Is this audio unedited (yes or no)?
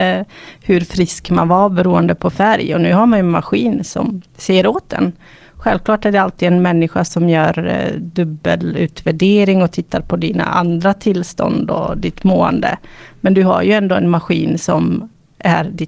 yes